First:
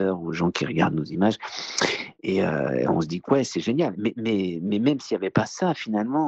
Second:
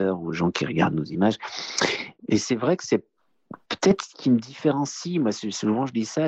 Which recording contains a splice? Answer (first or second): second